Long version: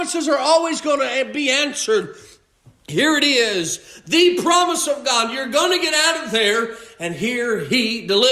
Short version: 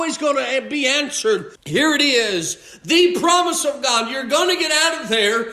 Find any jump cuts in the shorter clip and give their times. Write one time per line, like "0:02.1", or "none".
0:01.6